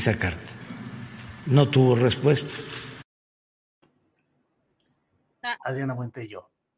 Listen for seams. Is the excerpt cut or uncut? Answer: cut